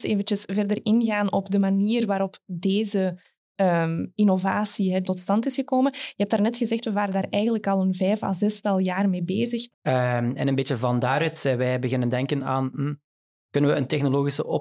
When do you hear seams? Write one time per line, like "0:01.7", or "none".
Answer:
0:05.0
0:09.7